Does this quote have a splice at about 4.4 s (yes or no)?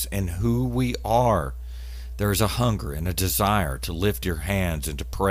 no